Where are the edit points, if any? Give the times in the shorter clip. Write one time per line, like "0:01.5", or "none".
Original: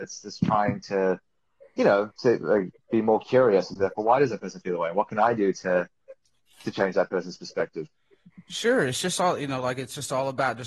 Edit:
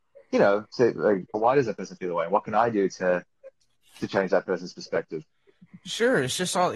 0:01.3